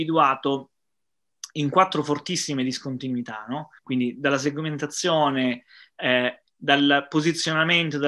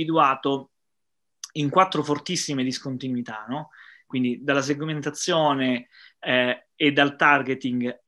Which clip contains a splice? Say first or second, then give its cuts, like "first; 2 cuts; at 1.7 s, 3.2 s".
first; 2 cuts; at 3.8 s, 6.5 s